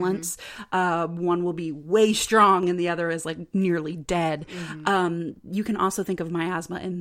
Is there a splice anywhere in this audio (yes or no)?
no